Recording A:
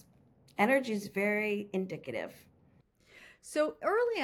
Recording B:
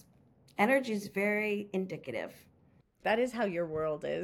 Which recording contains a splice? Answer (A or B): B